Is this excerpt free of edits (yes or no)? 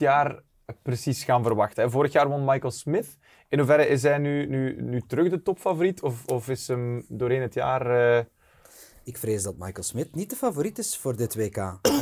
yes